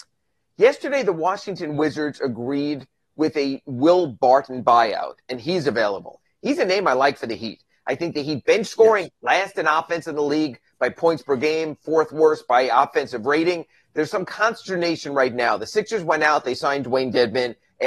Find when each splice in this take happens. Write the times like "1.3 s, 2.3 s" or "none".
13.8 s